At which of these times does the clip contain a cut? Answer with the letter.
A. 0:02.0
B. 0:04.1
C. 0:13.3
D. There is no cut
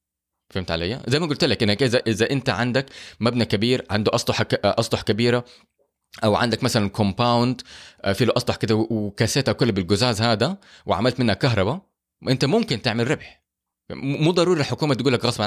A